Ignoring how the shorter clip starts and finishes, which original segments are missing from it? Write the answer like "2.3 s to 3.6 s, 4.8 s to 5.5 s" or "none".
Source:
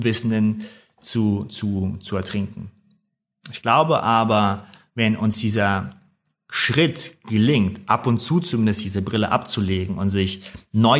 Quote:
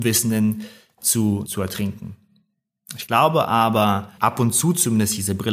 1.4 s to 2.0 s, 4.7 s to 7.8 s